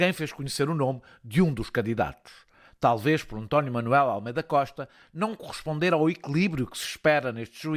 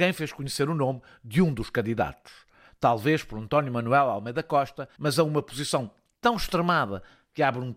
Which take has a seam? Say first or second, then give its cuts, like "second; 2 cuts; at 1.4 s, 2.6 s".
second; 1 cut; at 5.0 s